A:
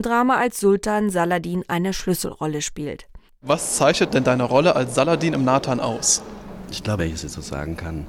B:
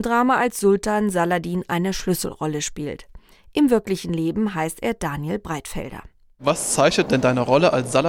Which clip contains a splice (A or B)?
A